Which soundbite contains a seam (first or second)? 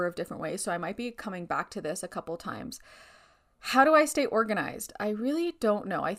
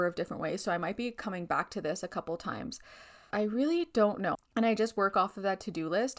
second